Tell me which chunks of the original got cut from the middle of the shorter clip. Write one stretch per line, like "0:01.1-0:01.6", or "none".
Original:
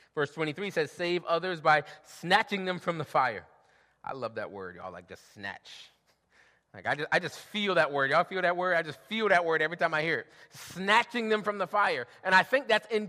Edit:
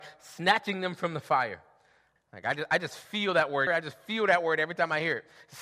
0:04.0-0:06.6
0:08.1-0:08.7